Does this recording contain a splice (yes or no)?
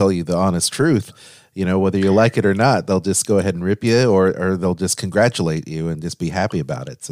no